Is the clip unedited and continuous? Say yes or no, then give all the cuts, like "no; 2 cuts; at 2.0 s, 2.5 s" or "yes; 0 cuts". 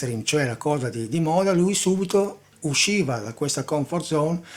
yes; 0 cuts